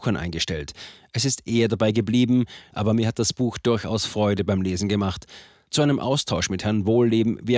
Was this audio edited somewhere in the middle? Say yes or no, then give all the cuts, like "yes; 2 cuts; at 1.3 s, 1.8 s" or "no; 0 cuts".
yes; 1 cut; at 2.7 s